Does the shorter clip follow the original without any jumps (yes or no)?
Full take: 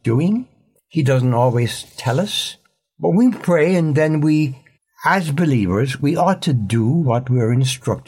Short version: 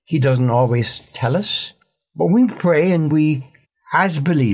no